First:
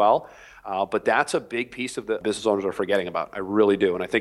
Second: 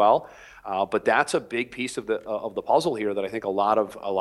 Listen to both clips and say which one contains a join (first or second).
first